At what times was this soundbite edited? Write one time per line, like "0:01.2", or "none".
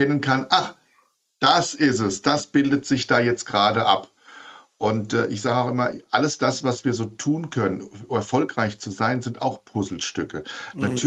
none